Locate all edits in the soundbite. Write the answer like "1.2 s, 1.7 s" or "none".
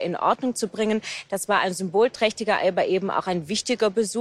none